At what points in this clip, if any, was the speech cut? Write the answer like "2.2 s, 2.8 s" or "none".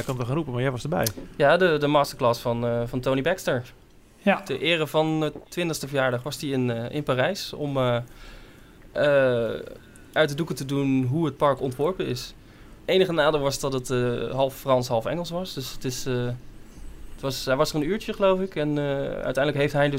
12.8 s